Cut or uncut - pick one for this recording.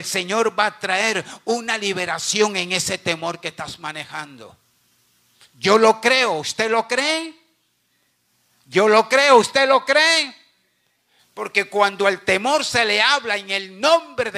cut